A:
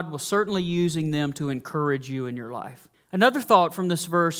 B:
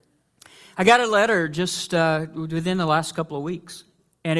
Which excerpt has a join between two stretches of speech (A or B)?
A